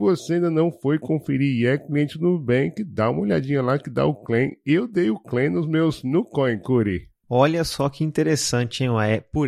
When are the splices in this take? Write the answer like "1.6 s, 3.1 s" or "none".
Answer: none

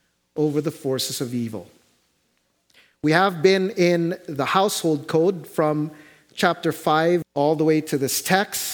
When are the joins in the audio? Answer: 7.2 s

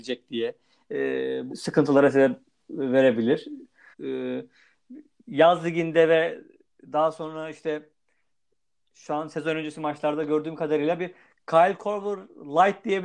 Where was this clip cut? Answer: 1.5 s, 3.9 s

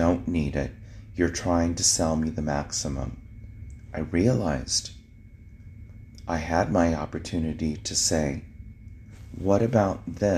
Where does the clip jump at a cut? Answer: none

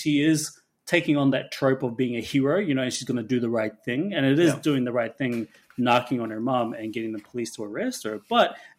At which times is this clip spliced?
none

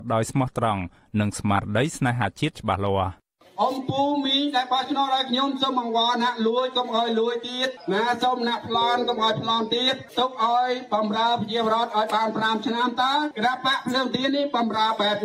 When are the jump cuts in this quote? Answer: none

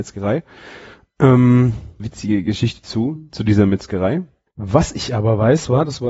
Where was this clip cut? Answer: 2.0 s, 4.5 s

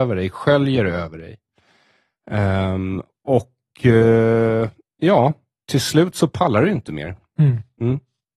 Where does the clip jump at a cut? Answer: none

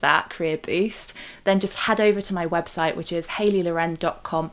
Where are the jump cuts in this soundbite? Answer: none

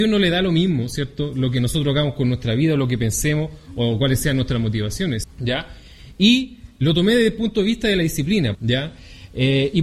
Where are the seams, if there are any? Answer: 5.2 s, 8.5 s

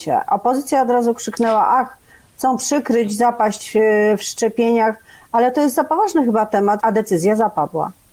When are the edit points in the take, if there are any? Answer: 6.8 s

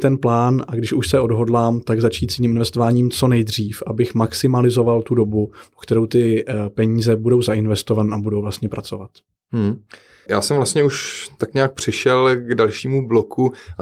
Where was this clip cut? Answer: 10.3 s

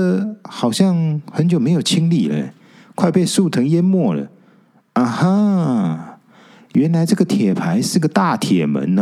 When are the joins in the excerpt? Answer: none

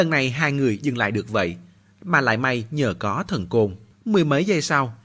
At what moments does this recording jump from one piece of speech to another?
3.9 s

